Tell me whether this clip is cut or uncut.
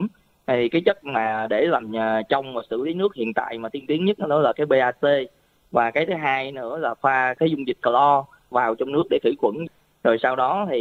cut